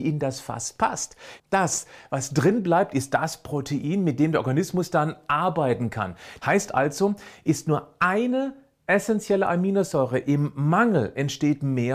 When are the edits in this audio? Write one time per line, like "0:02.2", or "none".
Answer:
0:01.4
0:06.4